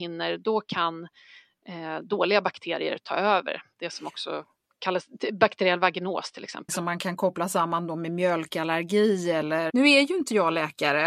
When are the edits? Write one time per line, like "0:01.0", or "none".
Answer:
0:06.7
0:09.7